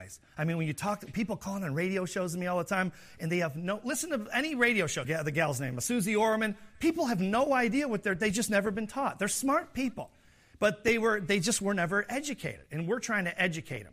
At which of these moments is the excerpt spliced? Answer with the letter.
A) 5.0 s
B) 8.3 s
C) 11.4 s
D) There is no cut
A